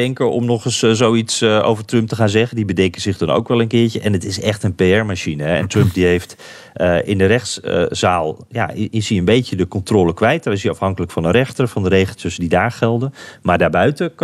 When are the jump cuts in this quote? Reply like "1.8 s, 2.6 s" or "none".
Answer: none